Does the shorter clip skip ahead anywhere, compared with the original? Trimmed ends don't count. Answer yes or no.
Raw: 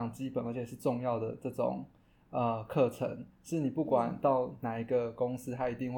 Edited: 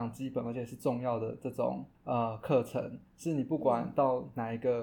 yes